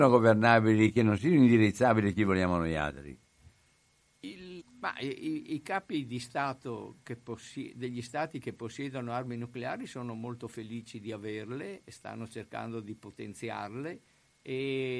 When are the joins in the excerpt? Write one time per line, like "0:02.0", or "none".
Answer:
0:04.6